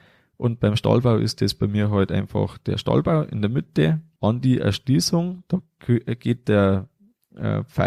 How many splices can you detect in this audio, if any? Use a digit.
1